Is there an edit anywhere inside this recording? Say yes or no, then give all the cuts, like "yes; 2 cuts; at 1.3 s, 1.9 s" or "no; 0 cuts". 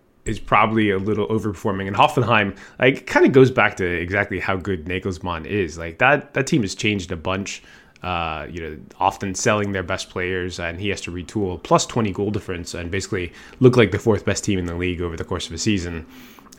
no; 0 cuts